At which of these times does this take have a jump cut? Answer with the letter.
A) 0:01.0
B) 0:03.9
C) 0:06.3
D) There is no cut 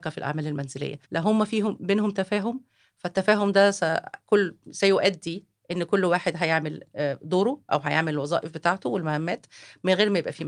A